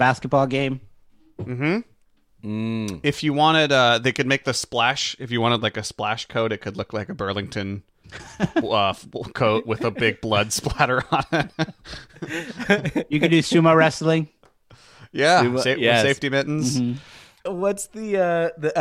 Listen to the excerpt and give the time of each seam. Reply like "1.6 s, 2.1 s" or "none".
17.5 s